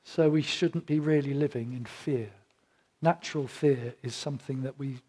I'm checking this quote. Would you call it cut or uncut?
uncut